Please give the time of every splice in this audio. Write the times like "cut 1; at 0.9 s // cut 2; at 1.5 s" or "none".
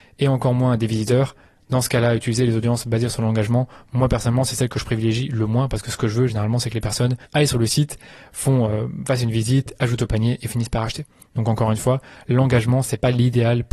cut 1; at 7.3 s